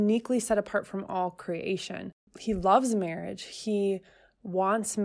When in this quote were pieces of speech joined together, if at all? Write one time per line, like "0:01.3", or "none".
none